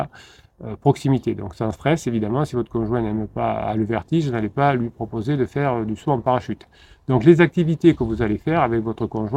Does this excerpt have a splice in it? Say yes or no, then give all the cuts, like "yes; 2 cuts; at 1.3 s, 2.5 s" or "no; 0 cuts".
no; 0 cuts